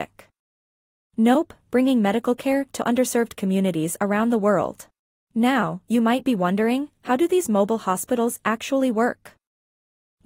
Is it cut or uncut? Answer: cut